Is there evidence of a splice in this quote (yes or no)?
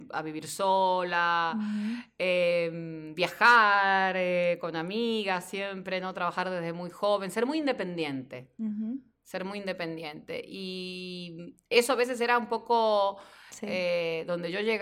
yes